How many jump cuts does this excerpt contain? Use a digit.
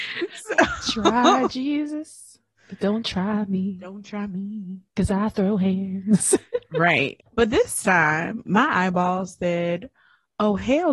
2